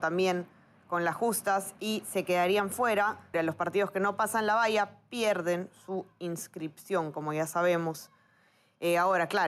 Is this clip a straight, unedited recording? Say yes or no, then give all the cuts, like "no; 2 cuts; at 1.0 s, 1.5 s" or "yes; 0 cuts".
no; 1 cut; at 3.3 s